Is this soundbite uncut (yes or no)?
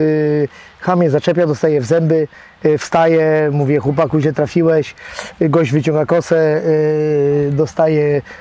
yes